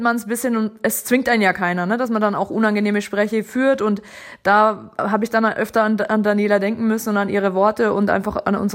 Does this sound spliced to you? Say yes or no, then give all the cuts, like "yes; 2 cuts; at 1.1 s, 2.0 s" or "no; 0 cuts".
no; 0 cuts